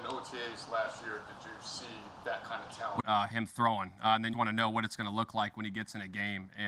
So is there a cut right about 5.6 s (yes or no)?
no